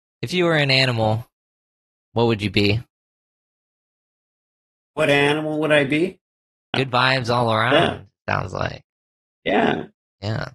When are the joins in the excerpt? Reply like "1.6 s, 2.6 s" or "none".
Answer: 6.7 s